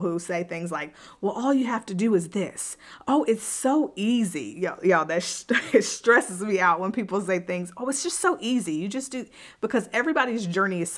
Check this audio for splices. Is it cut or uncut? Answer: uncut